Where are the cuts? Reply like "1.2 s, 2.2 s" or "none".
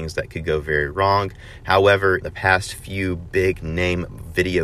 2.2 s